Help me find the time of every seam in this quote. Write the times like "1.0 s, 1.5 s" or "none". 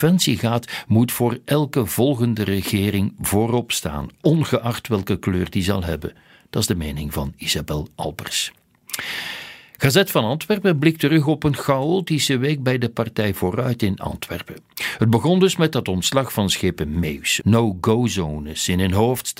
17.4 s